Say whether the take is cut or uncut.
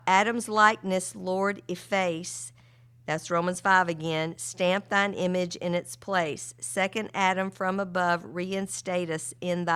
uncut